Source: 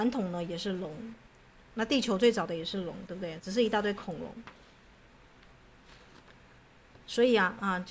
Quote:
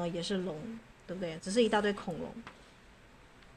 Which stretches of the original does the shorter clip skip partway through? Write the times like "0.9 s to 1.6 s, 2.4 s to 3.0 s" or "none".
1.4 s to 3.1 s